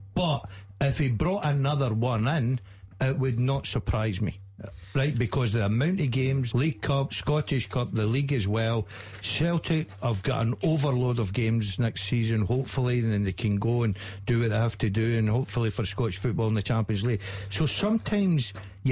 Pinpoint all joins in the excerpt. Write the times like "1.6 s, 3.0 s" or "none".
6.5 s